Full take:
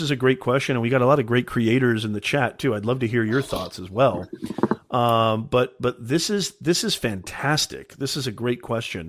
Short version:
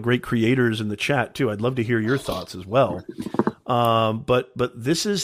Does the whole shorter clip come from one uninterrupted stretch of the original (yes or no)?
yes